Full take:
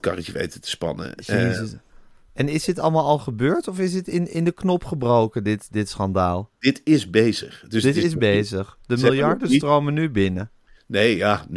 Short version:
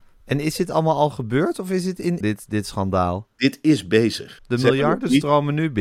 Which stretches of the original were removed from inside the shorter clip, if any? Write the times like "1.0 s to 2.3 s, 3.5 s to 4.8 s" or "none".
4.3 s to 5.4 s, 7.6 s to 8.8 s